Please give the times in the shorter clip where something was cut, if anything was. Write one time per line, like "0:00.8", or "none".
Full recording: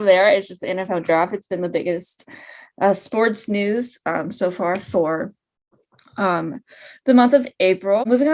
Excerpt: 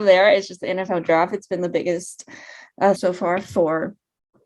0:03.0